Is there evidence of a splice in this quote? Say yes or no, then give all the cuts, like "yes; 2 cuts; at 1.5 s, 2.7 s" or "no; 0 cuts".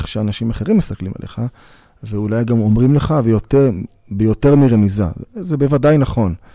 no; 0 cuts